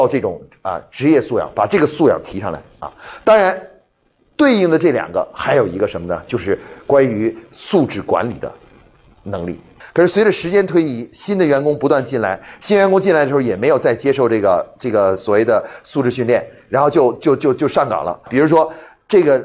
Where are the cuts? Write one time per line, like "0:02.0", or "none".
0:09.8
0:18.3